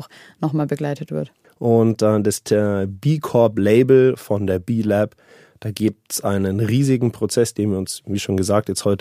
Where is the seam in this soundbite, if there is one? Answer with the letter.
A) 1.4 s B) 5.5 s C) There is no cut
A